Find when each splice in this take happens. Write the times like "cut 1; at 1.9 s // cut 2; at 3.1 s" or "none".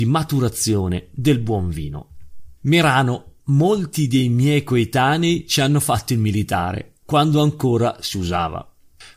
cut 1; at 2.6 s